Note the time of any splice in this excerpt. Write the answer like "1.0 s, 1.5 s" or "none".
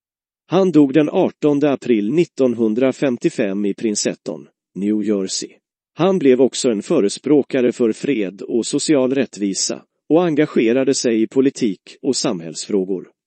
5.8 s